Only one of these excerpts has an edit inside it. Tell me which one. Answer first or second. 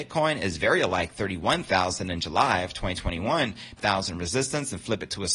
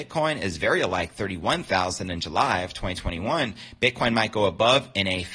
first